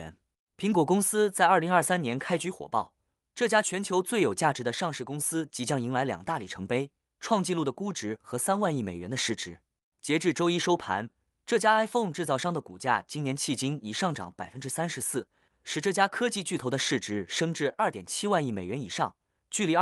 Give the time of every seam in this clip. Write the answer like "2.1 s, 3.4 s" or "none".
15.5 s